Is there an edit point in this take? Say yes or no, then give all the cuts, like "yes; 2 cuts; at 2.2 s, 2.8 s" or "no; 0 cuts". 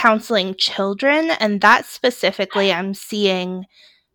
no; 0 cuts